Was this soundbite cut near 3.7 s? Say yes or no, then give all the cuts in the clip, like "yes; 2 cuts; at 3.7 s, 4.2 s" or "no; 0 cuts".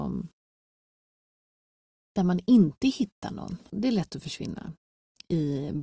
yes; 1 cut; at 3.7 s